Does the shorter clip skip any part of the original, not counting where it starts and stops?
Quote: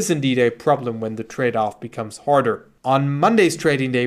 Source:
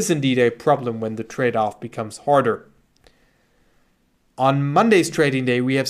yes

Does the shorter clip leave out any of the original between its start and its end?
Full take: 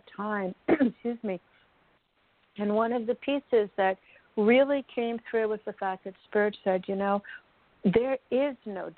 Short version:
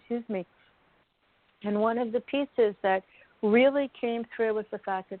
no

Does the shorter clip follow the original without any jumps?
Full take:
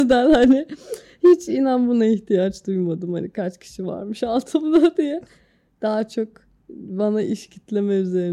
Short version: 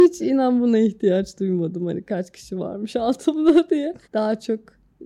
no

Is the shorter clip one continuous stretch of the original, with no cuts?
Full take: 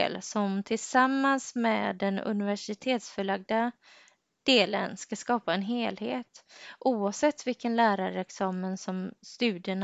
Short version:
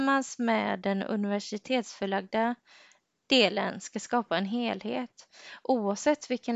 yes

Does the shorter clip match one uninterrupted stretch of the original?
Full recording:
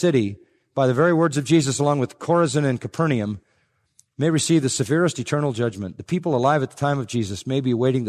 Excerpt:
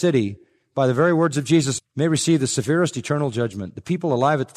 no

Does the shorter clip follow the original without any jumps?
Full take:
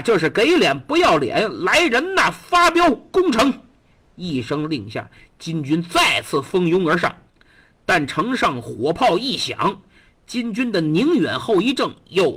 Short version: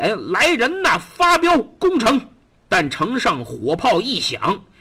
no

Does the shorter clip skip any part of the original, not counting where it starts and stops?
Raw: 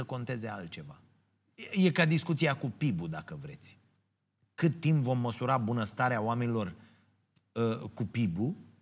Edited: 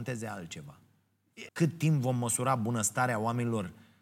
yes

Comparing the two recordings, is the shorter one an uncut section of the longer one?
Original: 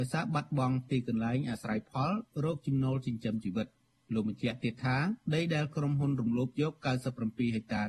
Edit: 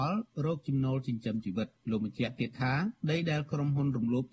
no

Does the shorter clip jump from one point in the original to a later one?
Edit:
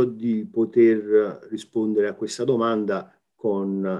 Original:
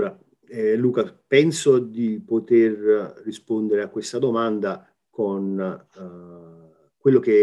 no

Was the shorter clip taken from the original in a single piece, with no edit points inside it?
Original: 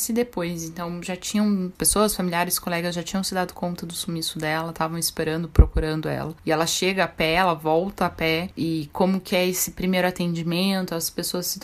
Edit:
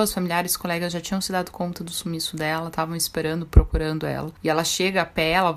yes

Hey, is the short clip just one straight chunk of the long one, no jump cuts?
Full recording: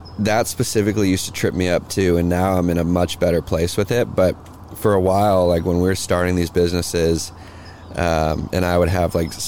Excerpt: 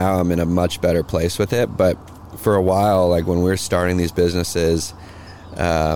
yes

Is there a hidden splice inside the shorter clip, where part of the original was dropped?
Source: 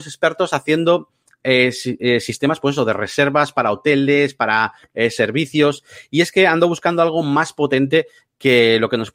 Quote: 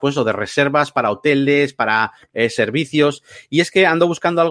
no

